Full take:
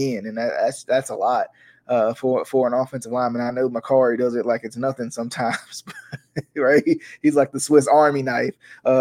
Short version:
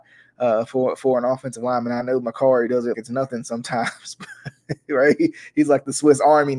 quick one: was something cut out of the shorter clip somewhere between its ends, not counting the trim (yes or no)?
yes